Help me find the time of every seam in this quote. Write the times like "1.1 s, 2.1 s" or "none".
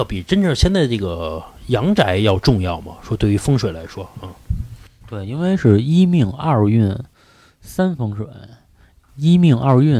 none